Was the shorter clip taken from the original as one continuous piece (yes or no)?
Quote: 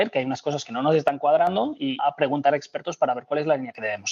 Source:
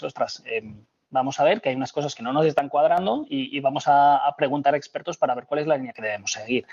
no